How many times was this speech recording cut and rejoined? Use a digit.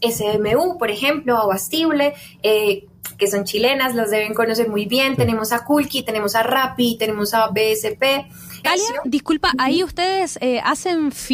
1